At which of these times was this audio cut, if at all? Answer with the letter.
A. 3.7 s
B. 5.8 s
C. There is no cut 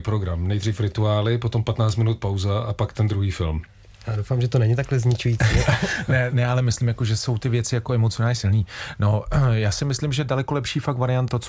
C